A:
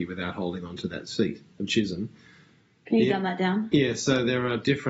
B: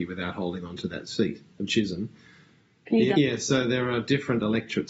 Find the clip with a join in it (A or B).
B